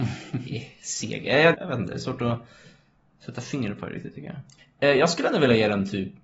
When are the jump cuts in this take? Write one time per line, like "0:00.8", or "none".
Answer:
0:01.5
0:04.6